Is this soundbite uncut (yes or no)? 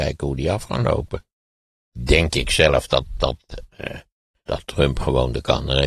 no